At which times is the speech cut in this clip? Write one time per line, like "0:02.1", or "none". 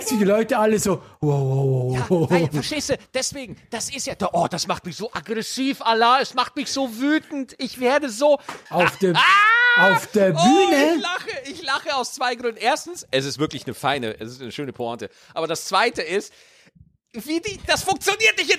0:01.2
0:08.7